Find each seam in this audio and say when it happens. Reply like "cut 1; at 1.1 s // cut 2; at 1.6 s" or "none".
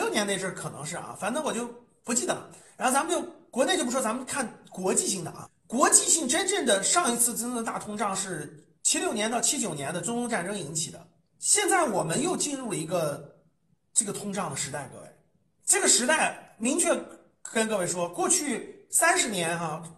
none